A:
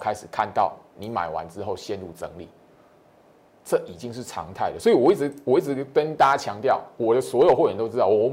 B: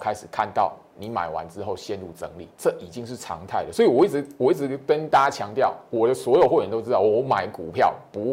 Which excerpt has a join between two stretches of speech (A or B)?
B